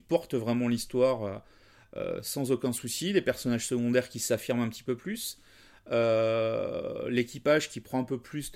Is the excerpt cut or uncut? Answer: uncut